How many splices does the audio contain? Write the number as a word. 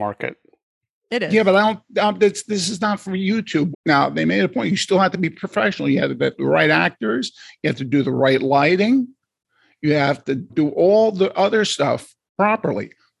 two